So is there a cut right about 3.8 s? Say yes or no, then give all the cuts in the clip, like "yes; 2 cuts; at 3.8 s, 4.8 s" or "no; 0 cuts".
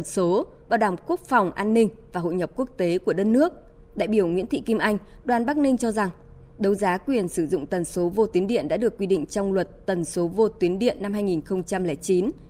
yes; 1 cut; at 3.8 s